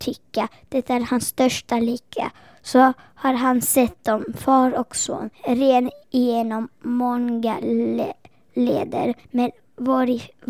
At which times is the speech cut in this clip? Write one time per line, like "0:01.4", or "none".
0:05.3
0:09.2